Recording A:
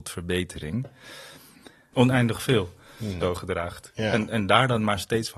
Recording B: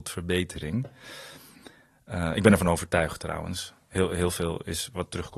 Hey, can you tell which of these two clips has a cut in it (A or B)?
A